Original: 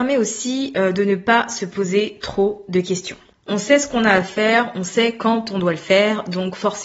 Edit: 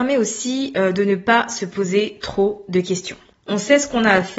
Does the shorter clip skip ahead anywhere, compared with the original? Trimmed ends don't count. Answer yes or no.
no